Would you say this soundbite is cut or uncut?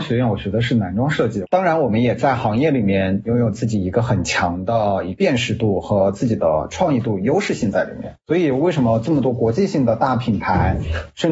cut